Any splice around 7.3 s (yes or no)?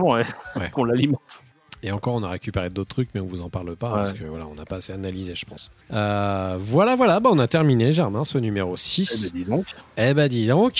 no